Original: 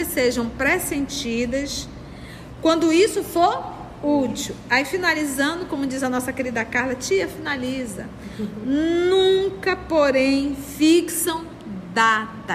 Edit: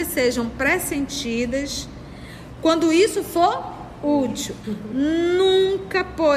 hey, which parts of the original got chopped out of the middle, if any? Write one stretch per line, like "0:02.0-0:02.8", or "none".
0:04.6-0:08.4